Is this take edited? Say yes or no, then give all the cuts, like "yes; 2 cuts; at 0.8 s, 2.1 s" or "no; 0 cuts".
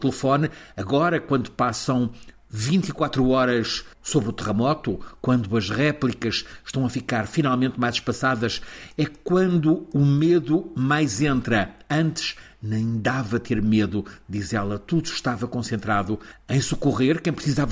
no; 0 cuts